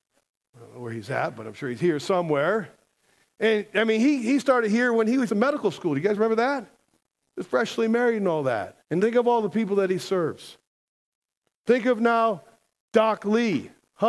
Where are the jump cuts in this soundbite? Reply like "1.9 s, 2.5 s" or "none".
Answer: 5.3 s, 8.8 s